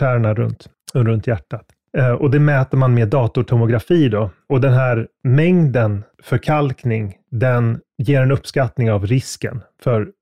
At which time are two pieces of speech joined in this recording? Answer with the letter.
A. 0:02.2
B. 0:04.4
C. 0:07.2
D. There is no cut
D